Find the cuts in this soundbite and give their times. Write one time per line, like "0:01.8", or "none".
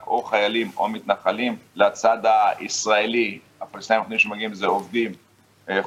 0:01.7